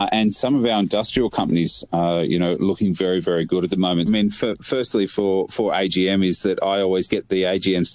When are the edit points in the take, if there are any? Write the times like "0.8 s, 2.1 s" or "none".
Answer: 4.1 s